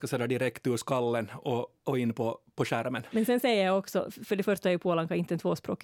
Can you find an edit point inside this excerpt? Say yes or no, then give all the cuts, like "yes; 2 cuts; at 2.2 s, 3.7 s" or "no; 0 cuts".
yes; 1 cut; at 3.1 s